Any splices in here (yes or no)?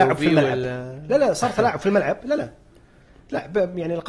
no